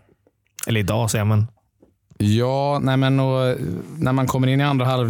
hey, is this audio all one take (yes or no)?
yes